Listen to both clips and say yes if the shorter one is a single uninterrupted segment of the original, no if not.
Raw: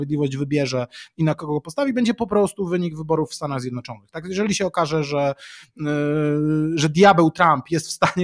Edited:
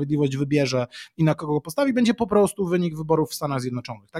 yes